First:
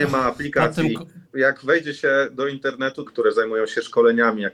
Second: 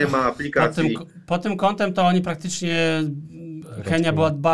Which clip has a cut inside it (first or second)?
first